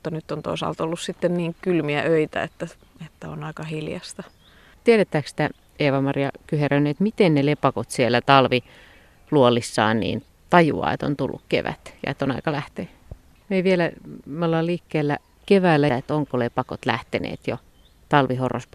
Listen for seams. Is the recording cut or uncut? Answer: cut